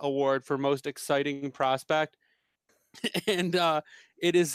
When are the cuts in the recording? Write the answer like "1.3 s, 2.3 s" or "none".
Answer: 2.6 s